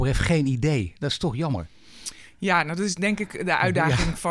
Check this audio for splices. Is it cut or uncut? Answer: uncut